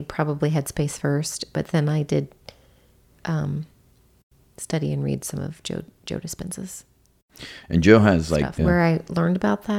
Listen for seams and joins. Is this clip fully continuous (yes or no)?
no